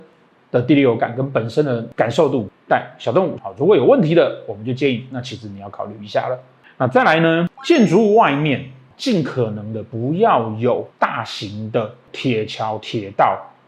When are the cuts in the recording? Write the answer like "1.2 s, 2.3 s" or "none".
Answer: 3.4 s